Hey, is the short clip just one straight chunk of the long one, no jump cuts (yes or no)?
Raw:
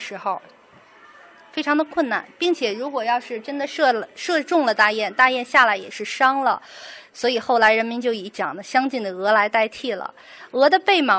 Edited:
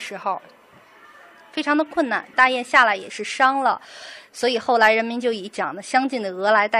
no